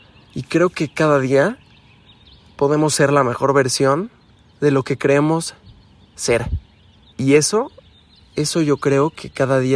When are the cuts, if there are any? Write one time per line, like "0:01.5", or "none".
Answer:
0:07.1